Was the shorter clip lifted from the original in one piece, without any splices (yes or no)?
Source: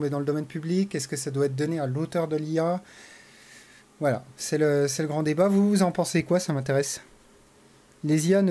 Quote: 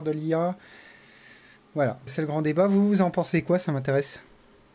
no